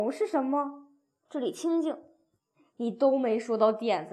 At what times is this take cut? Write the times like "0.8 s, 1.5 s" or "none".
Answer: 1.3 s

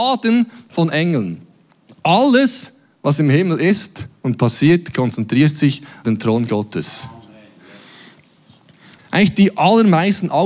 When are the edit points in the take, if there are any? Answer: 6.0 s, 9.0 s

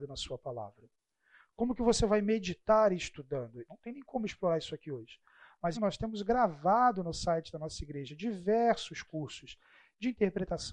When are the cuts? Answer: 3.6 s, 5.7 s

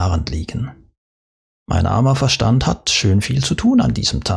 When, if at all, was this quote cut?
1.4 s

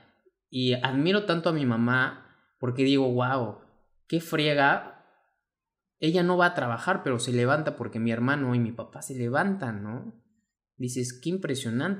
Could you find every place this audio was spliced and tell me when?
none

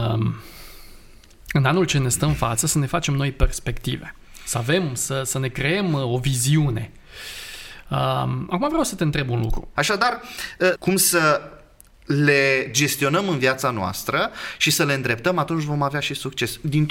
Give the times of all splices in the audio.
9.8 s, 10.8 s

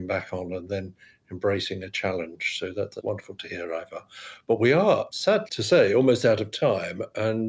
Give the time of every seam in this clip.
none

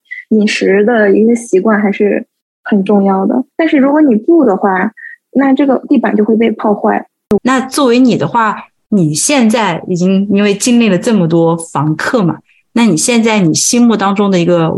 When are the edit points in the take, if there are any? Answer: 3.5 s, 7.4 s

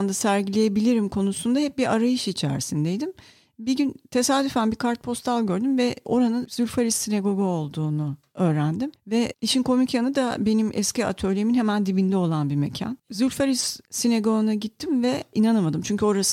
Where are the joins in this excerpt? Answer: 13.0 s

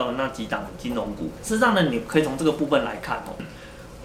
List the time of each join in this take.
1.4 s

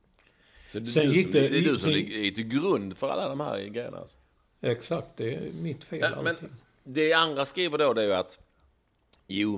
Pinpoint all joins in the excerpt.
none

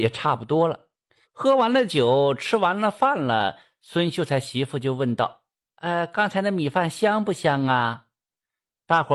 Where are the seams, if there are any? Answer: 1.2 s

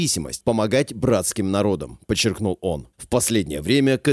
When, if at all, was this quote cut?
2.9 s

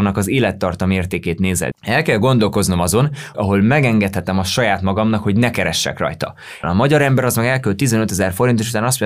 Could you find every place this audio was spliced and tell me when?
1.7 s, 3.3 s, 6.6 s

